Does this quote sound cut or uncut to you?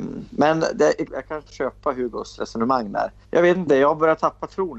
cut